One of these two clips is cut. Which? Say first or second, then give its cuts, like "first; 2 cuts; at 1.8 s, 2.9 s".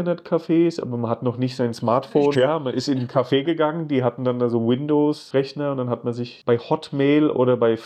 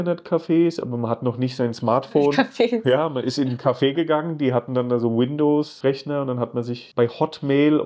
first; 1 cut; at 2.3 s